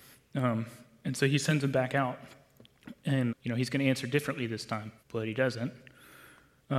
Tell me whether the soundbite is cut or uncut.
cut